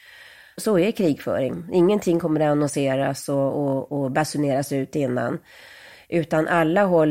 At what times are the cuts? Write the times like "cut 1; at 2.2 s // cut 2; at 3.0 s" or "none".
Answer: none